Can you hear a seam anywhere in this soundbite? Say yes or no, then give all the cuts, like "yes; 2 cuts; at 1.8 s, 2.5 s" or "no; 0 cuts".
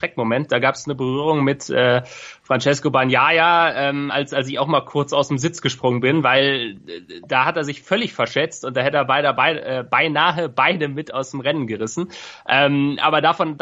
no; 0 cuts